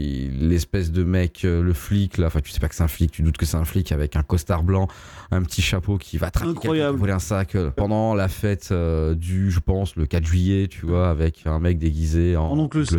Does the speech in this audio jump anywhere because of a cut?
yes; 1 cut; at 7.8 s

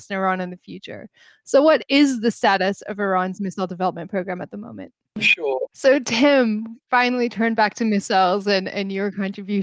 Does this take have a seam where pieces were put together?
yes; 1 cut; at 5.7 s

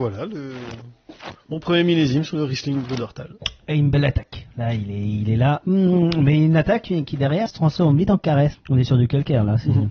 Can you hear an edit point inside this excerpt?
yes; 2 cuts; at 7.5 s, 8.5 s

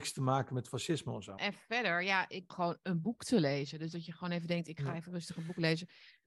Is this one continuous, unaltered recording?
no; 2 cuts; at 1.4 s, 2.5 s

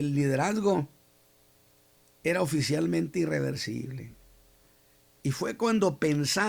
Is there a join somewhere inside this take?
no; 0 cuts

